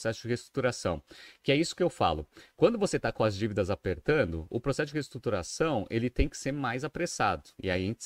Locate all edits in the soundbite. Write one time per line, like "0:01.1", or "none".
none